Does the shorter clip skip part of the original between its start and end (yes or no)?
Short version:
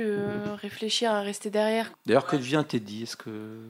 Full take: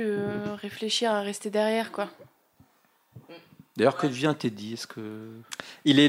yes